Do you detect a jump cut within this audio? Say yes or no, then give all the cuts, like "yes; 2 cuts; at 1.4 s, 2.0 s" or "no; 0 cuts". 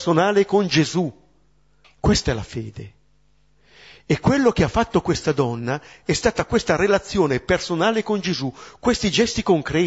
yes; 1 cut; at 1.8 s